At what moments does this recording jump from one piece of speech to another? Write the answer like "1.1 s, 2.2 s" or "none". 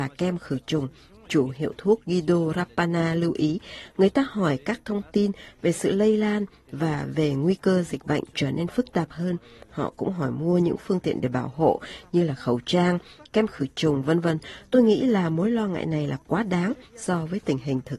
none